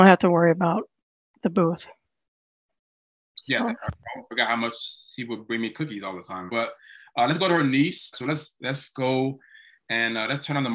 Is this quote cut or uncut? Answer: cut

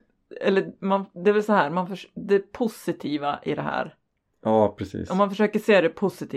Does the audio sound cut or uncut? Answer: uncut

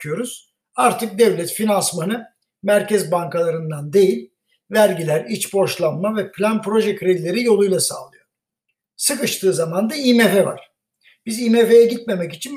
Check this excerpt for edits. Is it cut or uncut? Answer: uncut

